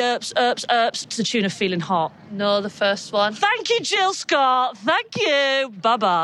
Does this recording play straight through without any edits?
yes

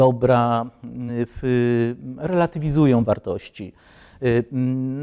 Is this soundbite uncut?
yes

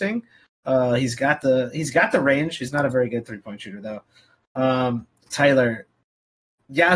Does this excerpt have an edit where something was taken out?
no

